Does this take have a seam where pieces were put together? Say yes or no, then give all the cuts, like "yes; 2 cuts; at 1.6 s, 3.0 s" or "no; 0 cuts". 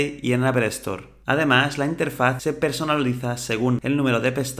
yes; 1 cut; at 1.2 s